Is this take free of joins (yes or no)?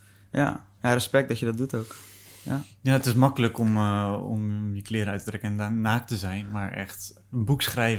yes